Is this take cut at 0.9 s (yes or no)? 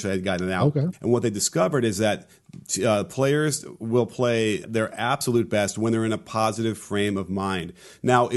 yes